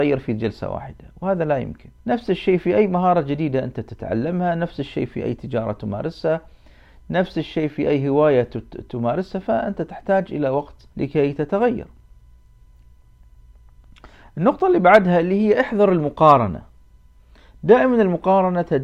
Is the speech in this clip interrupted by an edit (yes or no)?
yes